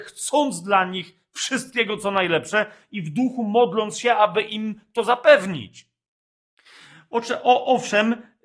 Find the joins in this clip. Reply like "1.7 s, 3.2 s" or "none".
none

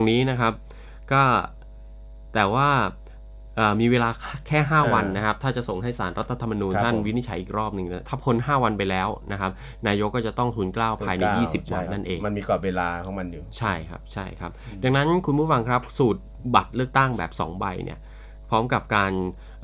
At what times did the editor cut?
11.8 s

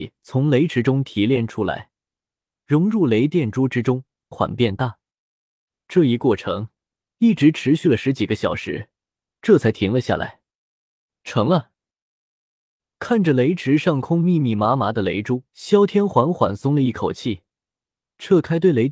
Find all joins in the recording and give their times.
4.3 s, 15.5 s

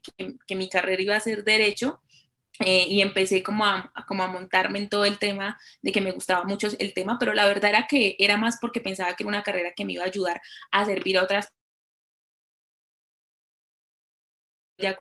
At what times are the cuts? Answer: none

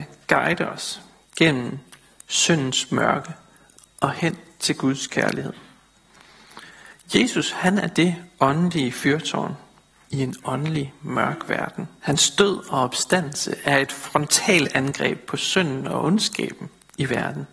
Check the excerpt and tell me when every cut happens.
10.1 s, 12.0 s

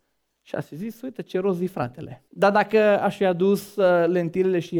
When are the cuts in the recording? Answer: 2.3 s

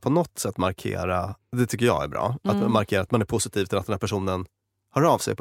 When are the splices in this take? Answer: 1.4 s

